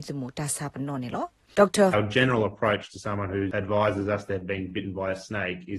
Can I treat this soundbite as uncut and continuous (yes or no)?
no